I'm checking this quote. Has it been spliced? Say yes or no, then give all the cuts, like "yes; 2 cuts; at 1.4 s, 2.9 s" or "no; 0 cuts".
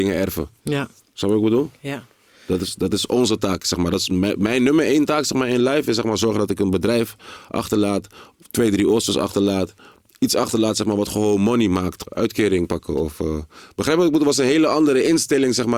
yes; 1 cut; at 12.0 s